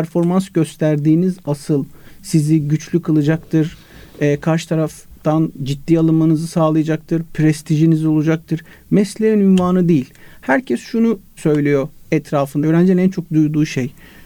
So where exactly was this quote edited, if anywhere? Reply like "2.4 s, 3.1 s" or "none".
12.6 s